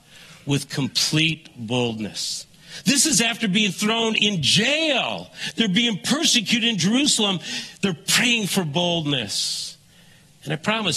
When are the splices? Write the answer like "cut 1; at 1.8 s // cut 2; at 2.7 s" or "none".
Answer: none